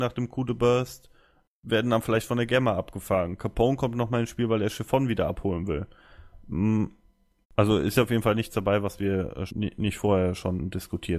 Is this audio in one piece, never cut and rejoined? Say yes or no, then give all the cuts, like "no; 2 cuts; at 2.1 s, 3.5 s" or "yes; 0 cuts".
no; 2 cuts; at 7.4 s, 9.5 s